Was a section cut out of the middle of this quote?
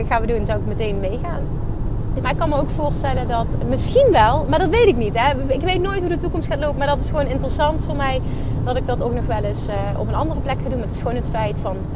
yes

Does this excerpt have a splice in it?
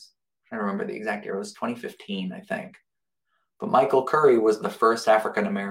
no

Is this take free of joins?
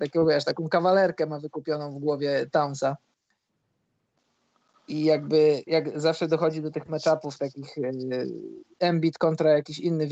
no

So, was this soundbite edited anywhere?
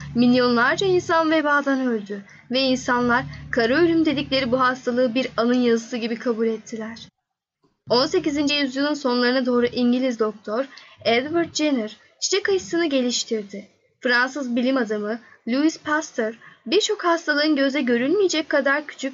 no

